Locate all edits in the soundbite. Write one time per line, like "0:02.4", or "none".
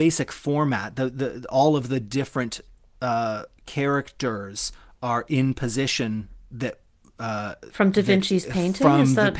0:03.6